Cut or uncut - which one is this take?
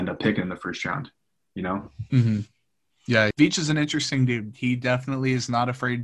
uncut